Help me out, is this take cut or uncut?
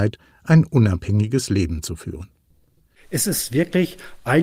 uncut